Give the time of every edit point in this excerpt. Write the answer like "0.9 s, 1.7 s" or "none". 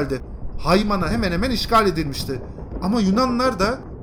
none